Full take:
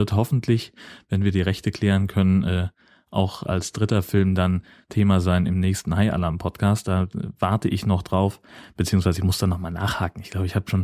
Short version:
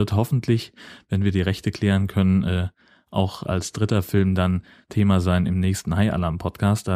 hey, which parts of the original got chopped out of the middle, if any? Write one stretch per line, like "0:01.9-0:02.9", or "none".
none

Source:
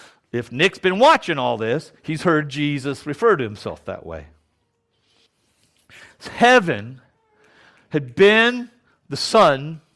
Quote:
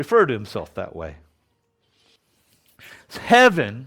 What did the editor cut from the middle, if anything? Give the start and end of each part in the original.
none

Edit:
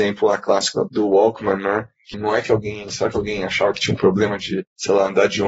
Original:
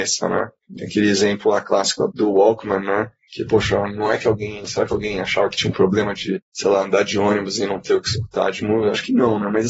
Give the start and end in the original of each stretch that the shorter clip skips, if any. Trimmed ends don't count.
0:03.4-0:03.9

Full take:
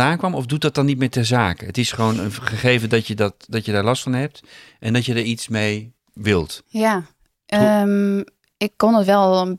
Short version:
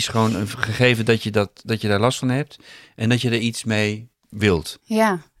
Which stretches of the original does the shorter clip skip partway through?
none

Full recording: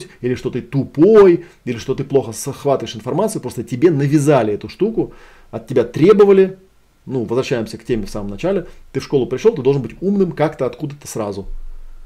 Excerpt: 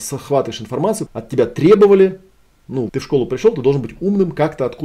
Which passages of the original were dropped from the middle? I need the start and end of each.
0:03.4-0:05.4
0:07.3-0:08.9

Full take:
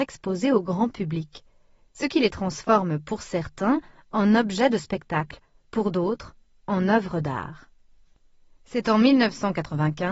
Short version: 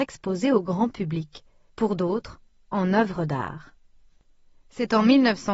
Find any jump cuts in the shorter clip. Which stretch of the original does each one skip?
0:01.7-0:05.6

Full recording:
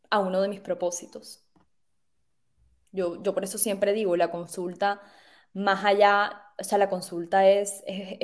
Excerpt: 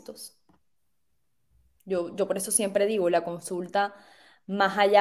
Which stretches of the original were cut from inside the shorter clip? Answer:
none

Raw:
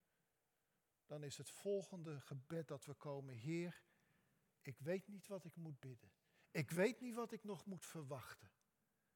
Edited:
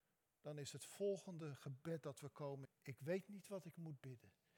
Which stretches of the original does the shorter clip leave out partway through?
0:03.3-0:04.4

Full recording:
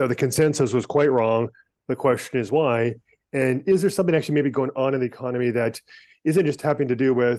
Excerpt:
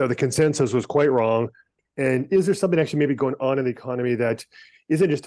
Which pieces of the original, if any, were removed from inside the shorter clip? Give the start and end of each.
0:01.8-0:03.1

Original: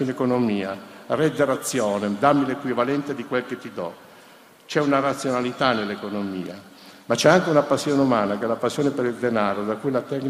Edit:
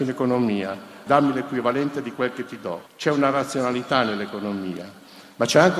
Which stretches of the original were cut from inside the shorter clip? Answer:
0:01.1-0:02.2
0:04.0-0:04.6

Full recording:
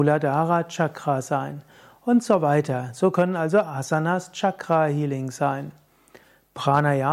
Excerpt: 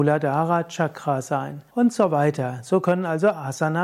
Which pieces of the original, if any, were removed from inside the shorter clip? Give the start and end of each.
0:01.7-0:02.0

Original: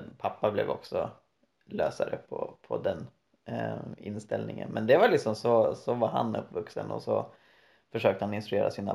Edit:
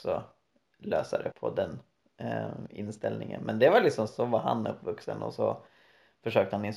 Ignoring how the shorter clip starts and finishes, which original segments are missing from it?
0:02.2-0:02.6
0:05.4-0:05.8

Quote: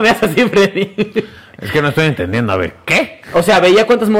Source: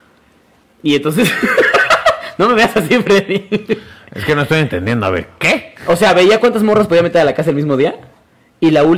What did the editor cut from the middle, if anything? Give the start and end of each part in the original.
none

